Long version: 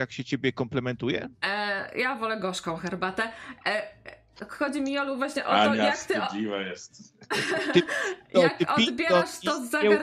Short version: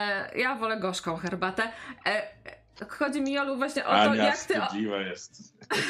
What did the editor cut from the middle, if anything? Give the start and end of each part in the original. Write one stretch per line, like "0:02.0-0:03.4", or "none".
none